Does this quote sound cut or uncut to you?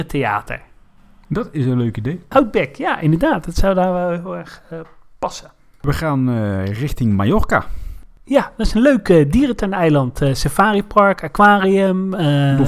cut